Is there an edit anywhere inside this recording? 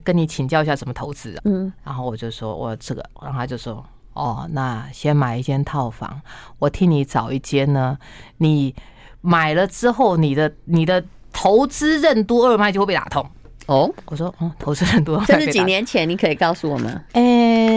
yes; 1 cut; at 1.4 s

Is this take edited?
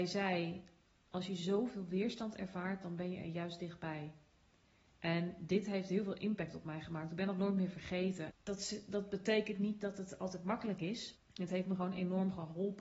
yes; 2 cuts; at 8.3 s, 11.1 s

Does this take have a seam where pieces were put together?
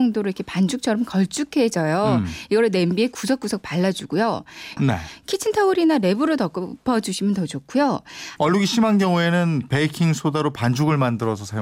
yes; 2 cuts; at 4.8 s, 8.4 s

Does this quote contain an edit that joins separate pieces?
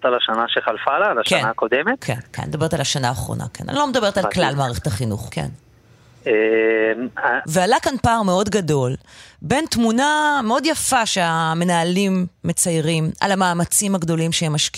yes; 2 cuts; at 5.3 s, 7.4 s

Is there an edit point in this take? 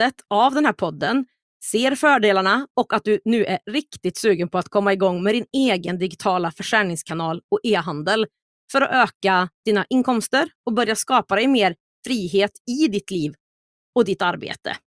no; 0 cuts

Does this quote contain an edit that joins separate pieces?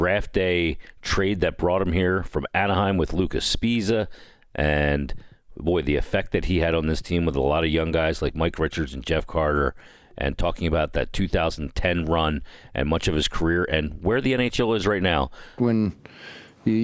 yes; 1 cut; at 15.6 s

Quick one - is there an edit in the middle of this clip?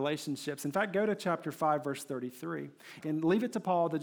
yes; 1 cut; at 3.0 s

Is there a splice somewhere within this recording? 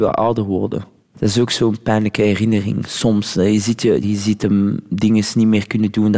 yes; 1 cut; at 4.0 s

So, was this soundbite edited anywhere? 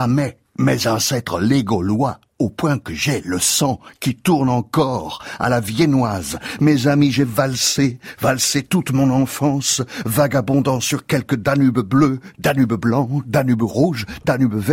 no; 0 cuts

